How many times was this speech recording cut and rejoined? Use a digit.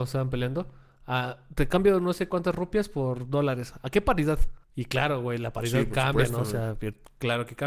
1